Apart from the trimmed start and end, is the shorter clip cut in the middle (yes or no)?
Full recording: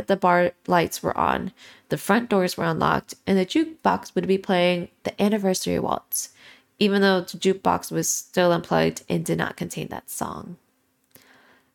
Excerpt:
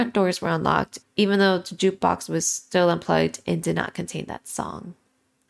yes